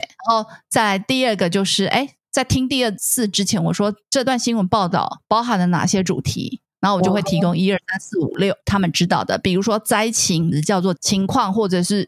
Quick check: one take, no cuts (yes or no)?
no